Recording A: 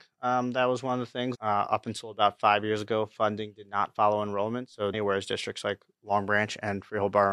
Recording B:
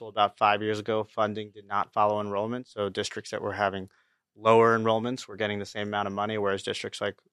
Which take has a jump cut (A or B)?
A